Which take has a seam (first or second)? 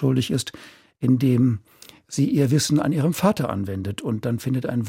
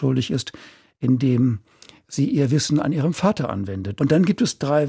second